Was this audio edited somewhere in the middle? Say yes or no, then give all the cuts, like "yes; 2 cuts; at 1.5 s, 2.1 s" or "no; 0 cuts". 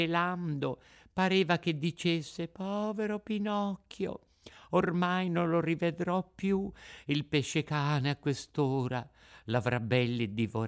no; 0 cuts